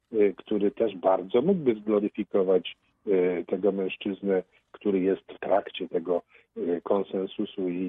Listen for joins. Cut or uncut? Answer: cut